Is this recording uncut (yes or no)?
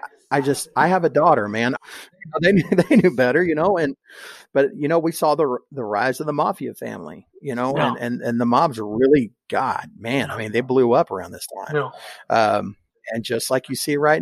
no